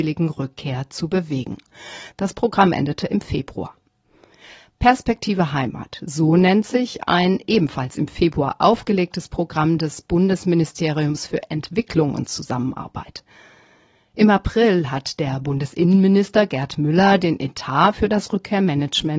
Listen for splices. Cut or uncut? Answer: cut